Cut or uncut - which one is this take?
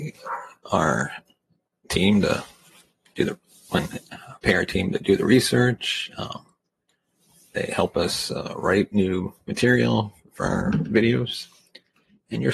uncut